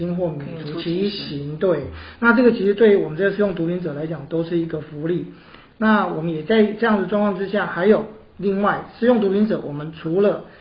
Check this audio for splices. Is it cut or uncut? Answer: uncut